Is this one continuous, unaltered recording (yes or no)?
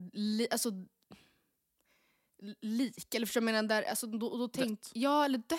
yes